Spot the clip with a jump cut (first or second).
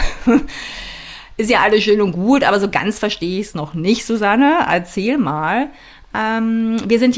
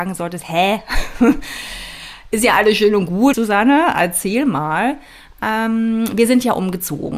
second